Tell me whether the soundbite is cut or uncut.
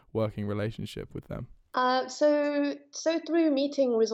uncut